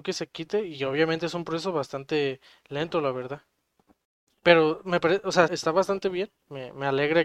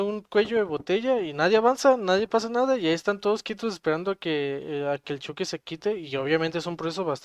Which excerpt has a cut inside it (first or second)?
first